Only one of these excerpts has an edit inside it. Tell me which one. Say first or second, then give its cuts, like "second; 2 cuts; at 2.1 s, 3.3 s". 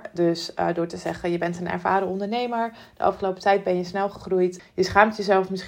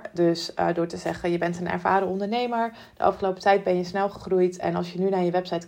first; 1 cut; at 4.6 s